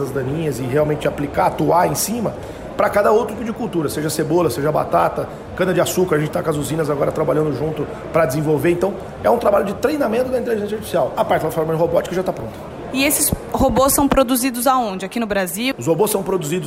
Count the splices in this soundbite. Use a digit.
2